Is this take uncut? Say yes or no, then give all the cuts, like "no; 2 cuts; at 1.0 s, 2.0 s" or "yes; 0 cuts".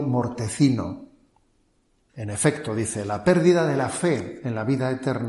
no; 1 cut; at 2.1 s